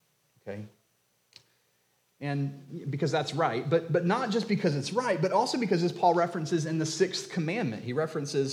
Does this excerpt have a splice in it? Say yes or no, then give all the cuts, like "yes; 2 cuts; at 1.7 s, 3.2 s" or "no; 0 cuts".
no; 0 cuts